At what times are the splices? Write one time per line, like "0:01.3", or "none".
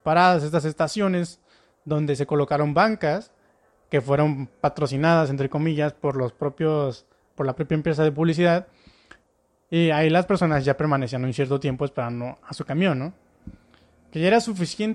none